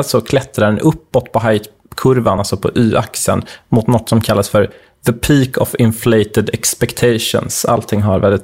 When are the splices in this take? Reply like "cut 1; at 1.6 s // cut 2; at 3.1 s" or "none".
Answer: none